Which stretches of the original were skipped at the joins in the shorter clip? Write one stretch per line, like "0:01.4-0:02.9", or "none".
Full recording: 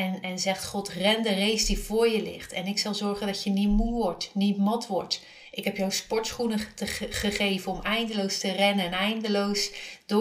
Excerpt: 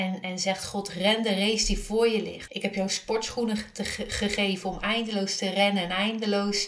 0:02.5-0:05.5

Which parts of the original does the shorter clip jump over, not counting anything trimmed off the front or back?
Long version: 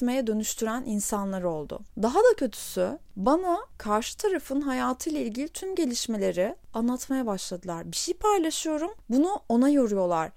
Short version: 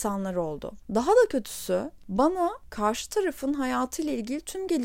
none

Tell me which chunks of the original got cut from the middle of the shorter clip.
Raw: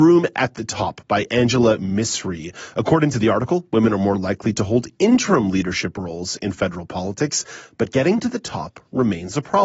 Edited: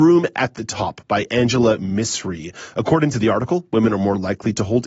none

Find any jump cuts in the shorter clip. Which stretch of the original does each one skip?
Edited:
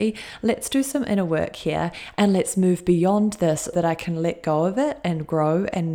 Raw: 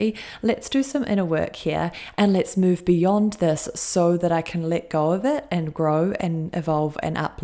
0:03.7-0:04.2

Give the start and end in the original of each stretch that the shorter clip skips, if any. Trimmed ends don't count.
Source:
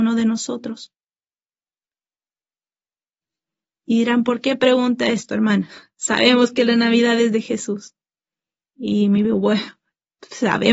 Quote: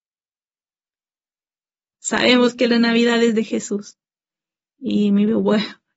0:02.9-0:05.9

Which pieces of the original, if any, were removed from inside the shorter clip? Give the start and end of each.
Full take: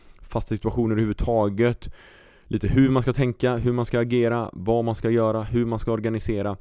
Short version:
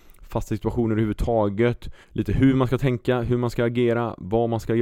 0:02.0-0:02.4

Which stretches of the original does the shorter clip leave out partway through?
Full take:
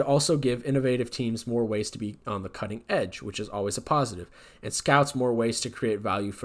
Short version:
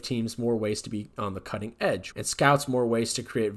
0:03.2-0:04.6

